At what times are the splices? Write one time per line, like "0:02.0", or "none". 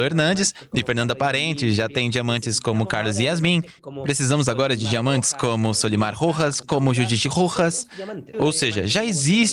0:06.6
0:08.3